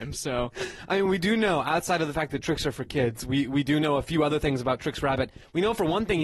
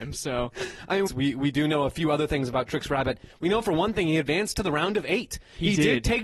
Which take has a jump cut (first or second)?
second